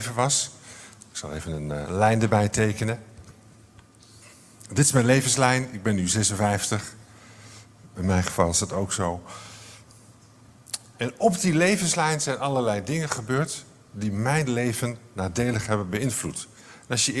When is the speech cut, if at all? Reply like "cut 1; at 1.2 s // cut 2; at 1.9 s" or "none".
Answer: cut 1; at 1.9 s // cut 2; at 7.9 s